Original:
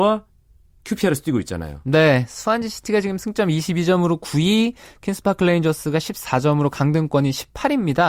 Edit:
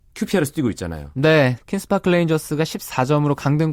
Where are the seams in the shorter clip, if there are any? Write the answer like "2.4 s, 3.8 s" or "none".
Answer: 1.6 s